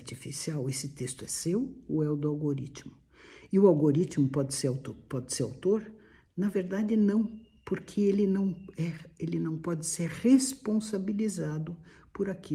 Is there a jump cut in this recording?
no; 0 cuts

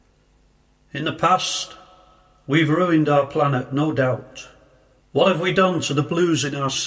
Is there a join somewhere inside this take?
yes; 1 cut; at 5.0 s

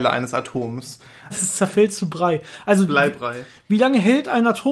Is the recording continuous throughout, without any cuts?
no; 1 cut; at 1.3 s

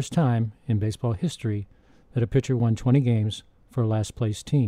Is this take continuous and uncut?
yes; 0 cuts

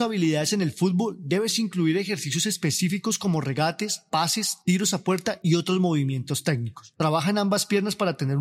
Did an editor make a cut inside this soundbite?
no; 0 cuts

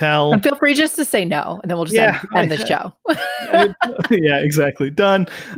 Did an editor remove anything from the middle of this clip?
no; 0 cuts

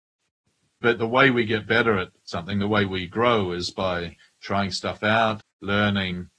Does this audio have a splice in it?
yes; 1 cut; at 5.4 s

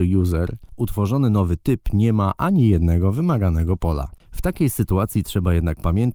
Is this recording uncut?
yes; 0 cuts

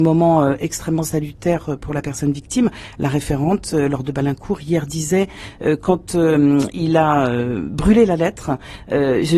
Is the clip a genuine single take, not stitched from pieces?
yes; 0 cuts

